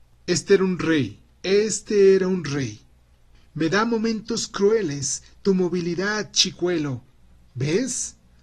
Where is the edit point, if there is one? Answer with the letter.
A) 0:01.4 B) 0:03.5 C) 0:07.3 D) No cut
A